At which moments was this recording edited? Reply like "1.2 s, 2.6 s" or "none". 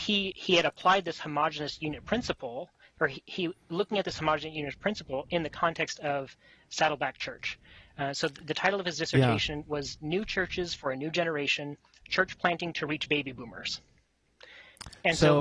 none

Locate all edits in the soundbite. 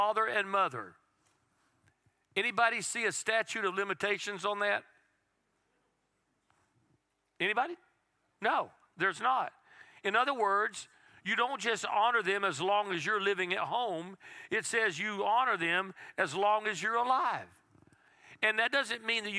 none

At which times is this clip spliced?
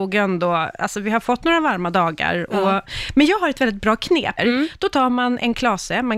4.4 s

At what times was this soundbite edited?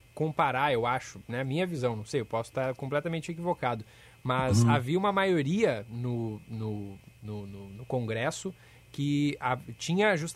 none

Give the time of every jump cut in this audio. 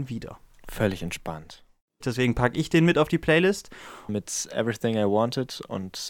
2.0 s, 4.1 s

